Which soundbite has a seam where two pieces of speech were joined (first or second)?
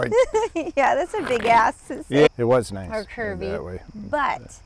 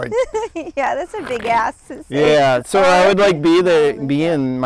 first